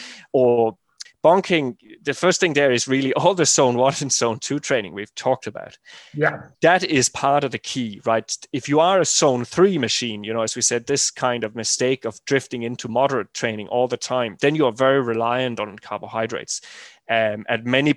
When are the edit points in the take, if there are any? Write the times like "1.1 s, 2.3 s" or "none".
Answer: 1.1 s, 6.5 s